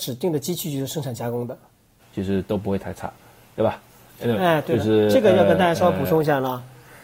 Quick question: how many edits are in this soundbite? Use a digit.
1